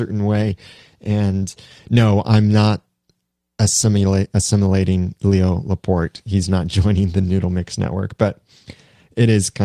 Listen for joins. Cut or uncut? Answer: uncut